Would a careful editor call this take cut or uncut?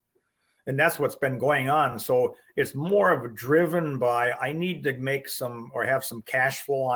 uncut